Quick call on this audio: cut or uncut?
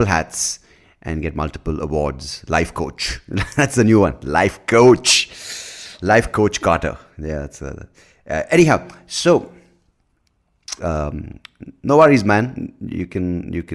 cut